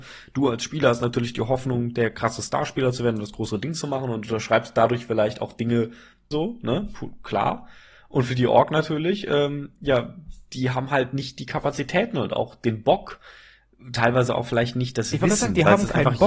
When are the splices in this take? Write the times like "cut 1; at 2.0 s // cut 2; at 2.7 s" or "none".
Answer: cut 1; at 6.3 s